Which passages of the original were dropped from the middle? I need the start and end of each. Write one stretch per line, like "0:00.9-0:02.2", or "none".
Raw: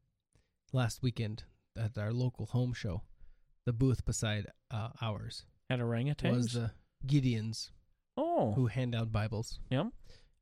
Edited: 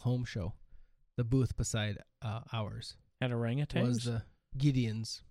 none